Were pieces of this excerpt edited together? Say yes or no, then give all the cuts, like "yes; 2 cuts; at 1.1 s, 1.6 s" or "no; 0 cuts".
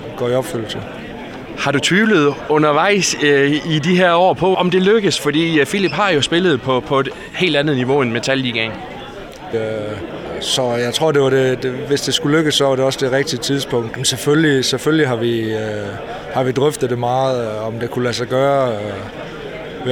yes; 3 cuts; at 4.5 s, 9.5 s, 13.9 s